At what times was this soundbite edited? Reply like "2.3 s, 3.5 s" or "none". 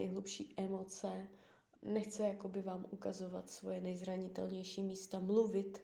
1.8 s